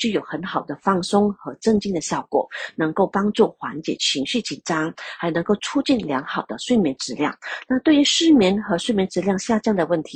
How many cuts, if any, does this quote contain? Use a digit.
0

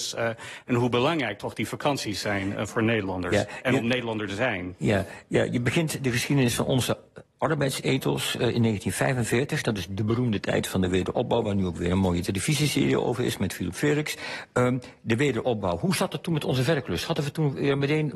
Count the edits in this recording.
0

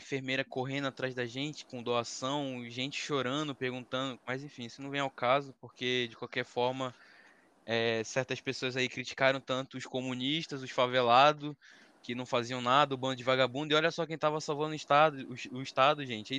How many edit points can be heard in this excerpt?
1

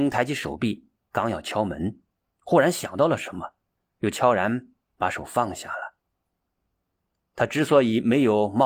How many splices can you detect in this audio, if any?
0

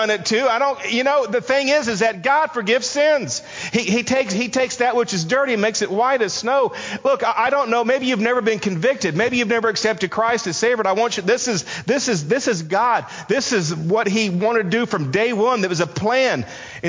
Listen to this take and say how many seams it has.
0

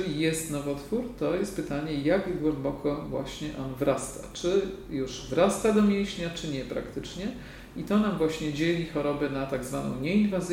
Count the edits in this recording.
0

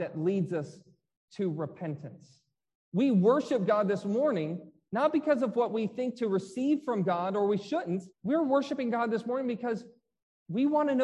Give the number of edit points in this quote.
2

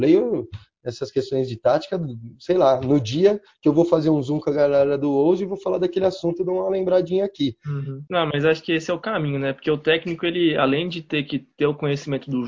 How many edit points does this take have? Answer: 1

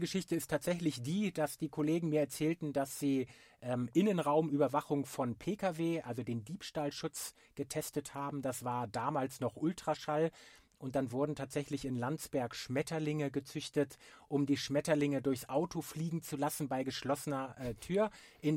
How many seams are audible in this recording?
0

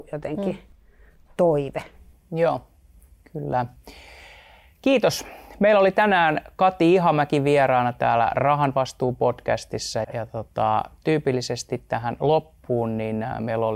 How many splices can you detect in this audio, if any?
1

